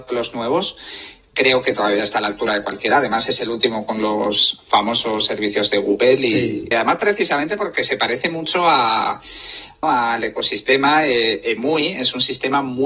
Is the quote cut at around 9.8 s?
yes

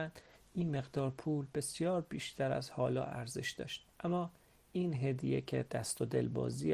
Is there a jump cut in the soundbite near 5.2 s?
no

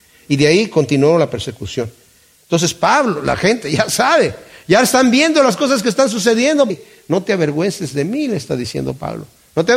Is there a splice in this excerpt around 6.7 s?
yes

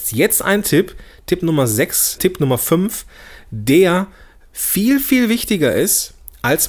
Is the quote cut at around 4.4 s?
no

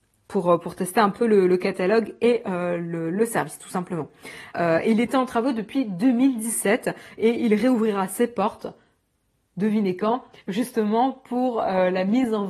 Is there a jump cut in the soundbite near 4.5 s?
yes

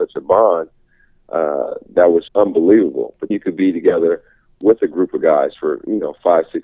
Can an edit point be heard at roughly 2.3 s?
yes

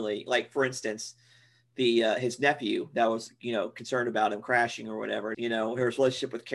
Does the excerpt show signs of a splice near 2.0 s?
no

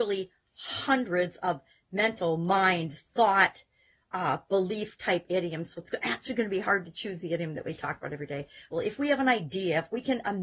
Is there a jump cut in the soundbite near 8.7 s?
yes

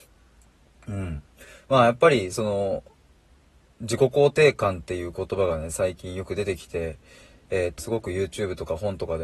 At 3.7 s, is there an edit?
no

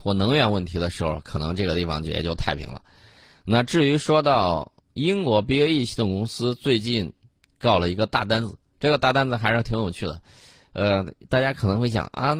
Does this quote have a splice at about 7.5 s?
no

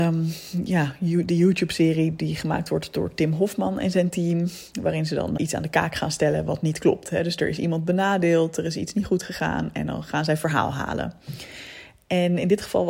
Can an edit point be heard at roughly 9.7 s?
no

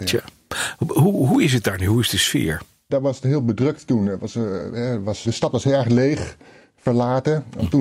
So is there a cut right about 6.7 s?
no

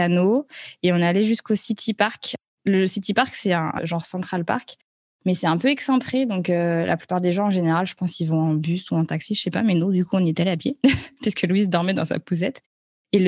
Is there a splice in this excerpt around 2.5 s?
no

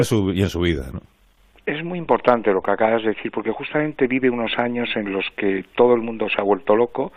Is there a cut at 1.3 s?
no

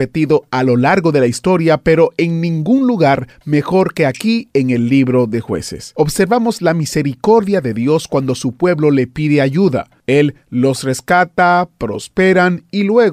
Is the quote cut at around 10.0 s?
no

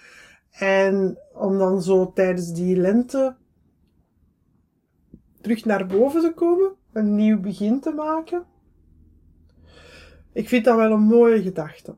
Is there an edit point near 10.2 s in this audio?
no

